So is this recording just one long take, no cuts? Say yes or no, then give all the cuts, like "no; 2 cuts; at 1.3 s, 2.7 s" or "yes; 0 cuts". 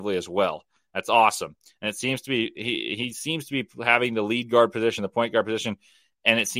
yes; 0 cuts